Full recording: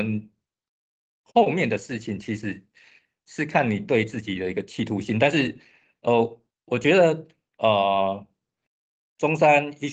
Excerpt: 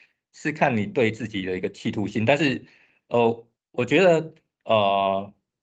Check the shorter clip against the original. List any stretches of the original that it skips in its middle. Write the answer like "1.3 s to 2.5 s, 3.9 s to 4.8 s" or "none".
none